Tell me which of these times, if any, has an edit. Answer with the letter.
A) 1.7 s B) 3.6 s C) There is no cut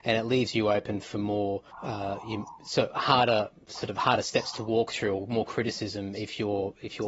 A